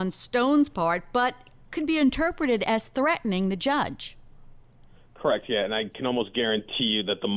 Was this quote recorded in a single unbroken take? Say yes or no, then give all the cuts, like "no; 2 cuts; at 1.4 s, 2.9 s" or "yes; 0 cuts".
yes; 0 cuts